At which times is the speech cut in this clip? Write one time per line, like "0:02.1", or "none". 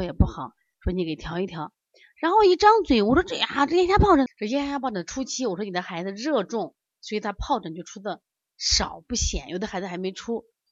0:04.3